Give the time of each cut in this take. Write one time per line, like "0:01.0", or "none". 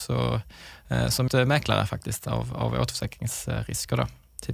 0:01.3